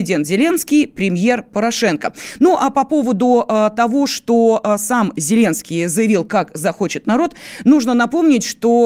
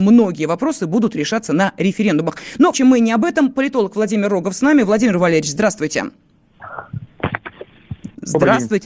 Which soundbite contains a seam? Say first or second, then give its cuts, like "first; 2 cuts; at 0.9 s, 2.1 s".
second; 1 cut; at 2.7 s